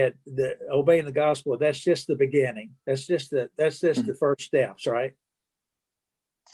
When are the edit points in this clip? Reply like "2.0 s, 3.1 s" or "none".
none